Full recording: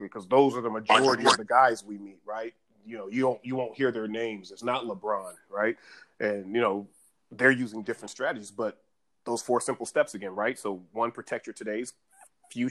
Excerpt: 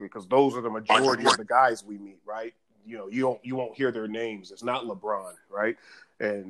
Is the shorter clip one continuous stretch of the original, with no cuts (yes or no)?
yes